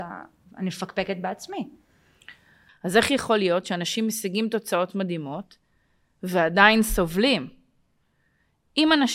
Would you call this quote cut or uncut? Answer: cut